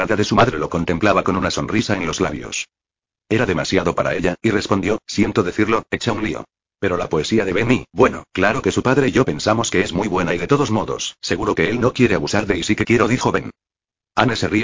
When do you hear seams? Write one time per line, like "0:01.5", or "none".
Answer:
0:06.6

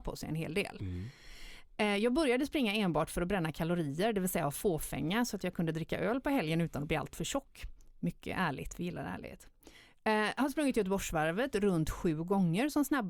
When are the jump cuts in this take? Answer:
none

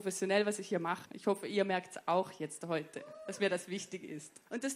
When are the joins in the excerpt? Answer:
0:01.1

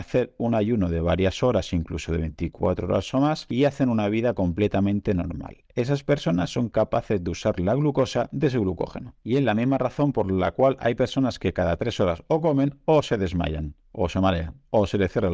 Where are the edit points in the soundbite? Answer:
none

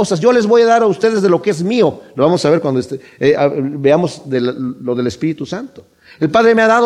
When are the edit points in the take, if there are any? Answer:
none

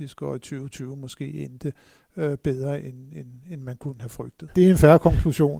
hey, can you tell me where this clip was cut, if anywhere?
0:04.5

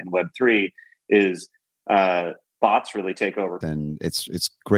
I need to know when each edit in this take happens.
0:02.4
0:03.6

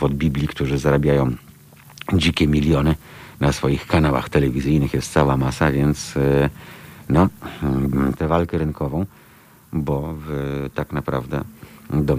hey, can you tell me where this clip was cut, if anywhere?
0:08.2

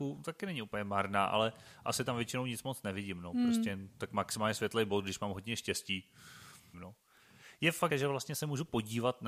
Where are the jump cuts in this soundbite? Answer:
0:06.7
0:07.9

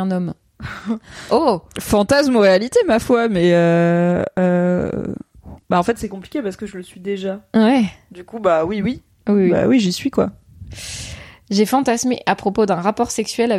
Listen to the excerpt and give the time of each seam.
none

